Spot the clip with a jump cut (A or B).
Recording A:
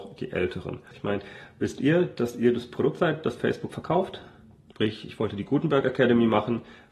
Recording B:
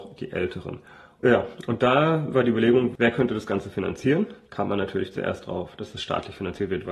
A